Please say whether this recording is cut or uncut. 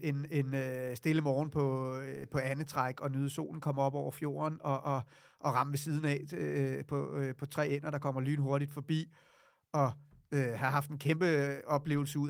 uncut